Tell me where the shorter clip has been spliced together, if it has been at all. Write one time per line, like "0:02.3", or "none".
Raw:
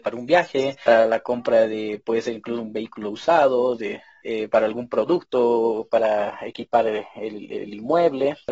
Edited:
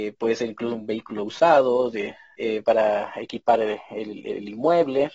0:02.6